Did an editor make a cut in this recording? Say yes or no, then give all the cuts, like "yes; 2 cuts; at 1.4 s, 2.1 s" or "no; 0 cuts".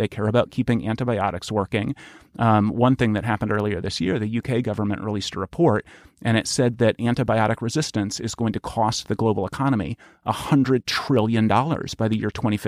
no; 0 cuts